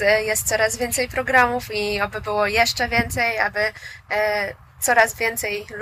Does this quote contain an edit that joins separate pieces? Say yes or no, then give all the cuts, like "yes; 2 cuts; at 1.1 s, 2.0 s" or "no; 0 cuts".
no; 0 cuts